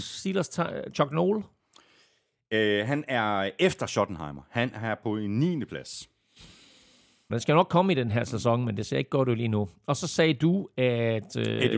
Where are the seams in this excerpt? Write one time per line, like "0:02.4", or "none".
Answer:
0:07.3